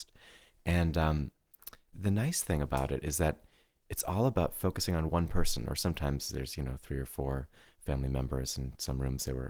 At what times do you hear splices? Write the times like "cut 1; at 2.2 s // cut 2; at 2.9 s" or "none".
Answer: cut 1; at 1.9 s